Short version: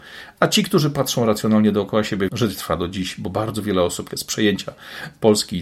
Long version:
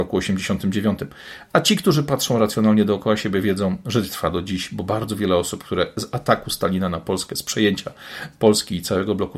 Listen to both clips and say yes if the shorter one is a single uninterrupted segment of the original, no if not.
no